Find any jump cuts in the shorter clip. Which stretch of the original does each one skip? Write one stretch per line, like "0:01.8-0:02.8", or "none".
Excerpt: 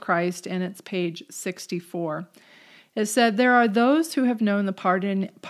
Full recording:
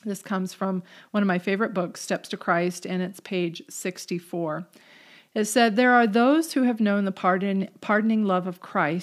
none